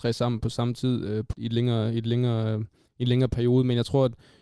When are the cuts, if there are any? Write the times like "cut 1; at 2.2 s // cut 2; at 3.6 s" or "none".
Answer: cut 1; at 1.3 s